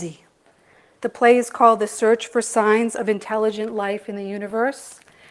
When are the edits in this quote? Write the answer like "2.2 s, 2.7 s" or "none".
1.0 s